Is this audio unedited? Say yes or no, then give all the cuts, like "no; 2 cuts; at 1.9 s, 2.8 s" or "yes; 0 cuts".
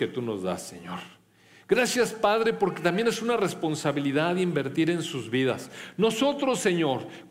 yes; 0 cuts